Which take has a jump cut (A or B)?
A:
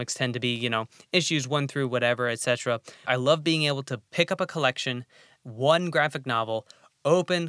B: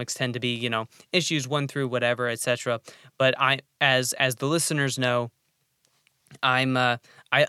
A